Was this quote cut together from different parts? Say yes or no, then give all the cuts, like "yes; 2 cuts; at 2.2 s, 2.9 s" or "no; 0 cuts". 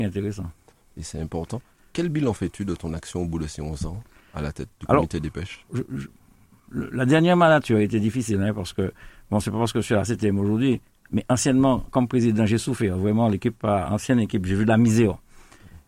yes; 1 cut; at 5.7 s